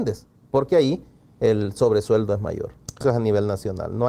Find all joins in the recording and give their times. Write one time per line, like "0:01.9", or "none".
0:03.0